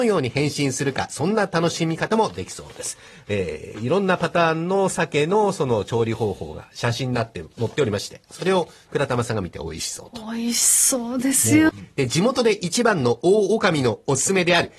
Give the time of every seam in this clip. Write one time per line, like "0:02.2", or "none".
0:11.7

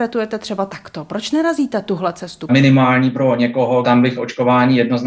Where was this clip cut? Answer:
0:02.5
0:03.8

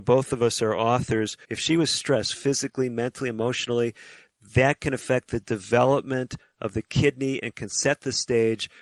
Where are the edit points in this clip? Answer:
0:01.4

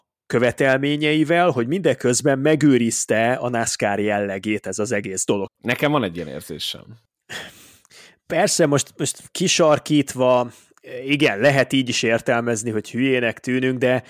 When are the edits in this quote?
0:05.5

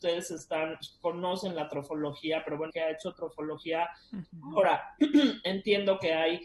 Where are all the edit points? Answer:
0:02.7
0:04.2

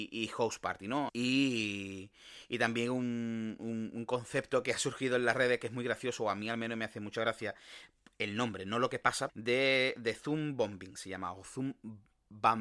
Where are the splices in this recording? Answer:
0:01.1
0:09.3

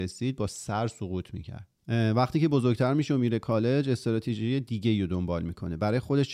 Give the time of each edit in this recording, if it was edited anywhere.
0:01.8

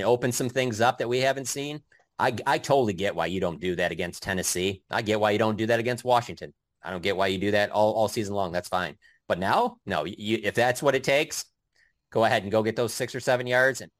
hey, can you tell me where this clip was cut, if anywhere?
none

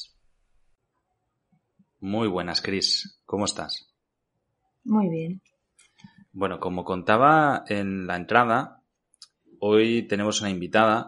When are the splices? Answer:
none

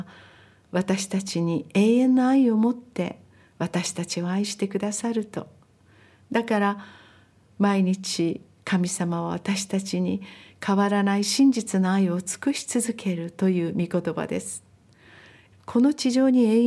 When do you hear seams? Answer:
0:15.5

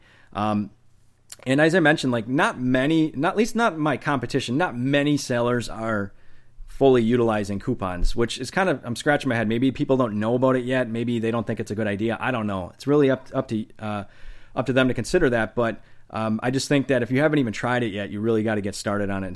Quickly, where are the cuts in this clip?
none

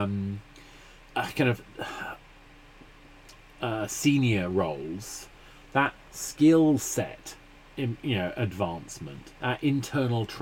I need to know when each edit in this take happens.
0:09.4

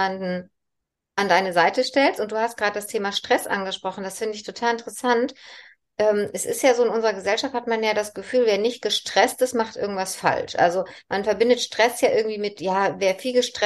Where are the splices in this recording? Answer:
none

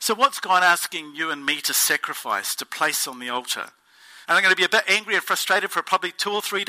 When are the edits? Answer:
0:04.3

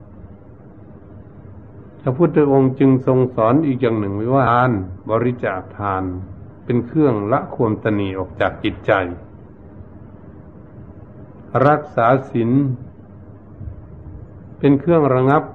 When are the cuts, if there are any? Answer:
0:04.5

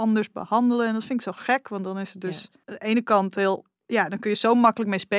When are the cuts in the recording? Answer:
0:02.6

